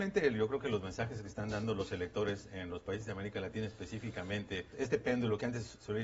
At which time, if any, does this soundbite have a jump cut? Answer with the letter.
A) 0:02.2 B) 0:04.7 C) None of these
B